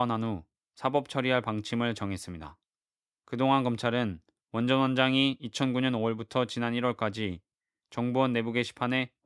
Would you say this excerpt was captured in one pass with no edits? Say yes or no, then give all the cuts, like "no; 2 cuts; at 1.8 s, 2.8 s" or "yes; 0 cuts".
yes; 0 cuts